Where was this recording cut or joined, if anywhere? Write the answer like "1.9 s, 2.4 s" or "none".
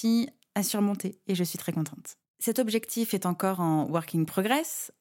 2.3 s